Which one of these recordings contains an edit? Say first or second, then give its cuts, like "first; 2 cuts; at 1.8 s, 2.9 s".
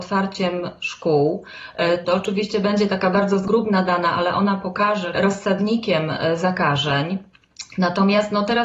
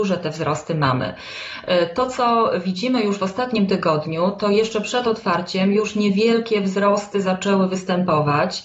first; 2 cuts; at 2.0 s, 5.1 s